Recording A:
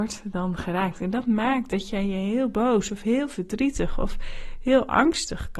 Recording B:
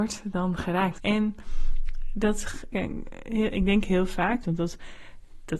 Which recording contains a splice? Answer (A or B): B